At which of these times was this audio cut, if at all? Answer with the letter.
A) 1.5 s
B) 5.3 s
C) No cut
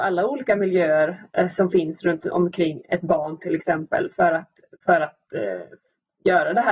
C